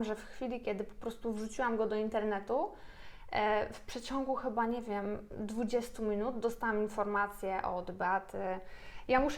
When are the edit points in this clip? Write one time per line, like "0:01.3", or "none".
none